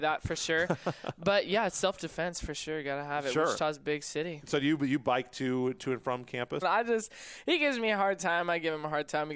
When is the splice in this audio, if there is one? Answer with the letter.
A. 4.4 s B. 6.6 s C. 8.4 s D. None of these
B